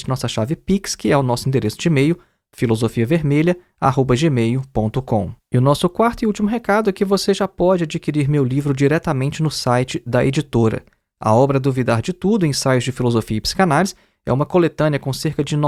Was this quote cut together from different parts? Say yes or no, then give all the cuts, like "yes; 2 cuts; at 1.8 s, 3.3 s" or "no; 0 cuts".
no; 0 cuts